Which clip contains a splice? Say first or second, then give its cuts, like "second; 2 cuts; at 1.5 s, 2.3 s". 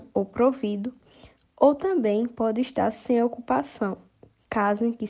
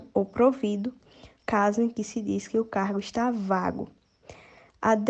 second; 1 cut; at 1.4 s